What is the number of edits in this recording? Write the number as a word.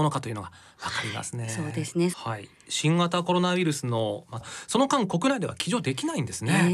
two